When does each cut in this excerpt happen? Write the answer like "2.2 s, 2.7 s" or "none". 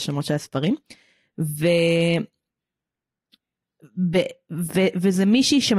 none